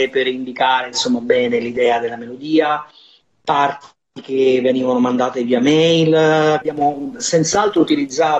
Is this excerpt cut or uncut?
cut